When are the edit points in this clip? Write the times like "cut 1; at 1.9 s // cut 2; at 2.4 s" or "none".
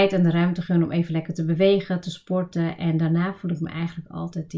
cut 1; at 2.0 s